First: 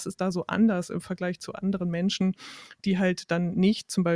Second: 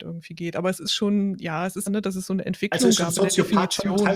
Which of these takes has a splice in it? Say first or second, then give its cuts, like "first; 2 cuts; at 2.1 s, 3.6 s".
second; 1 cut; at 1.9 s